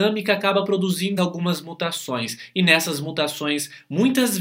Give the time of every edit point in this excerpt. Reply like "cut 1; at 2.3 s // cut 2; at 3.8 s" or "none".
cut 1; at 1.2 s